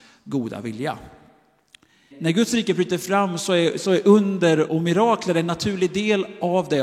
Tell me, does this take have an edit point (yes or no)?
yes